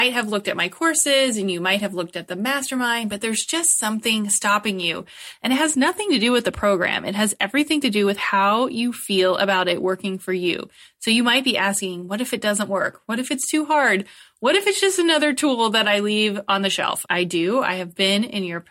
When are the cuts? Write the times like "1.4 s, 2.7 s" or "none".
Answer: 17.1 s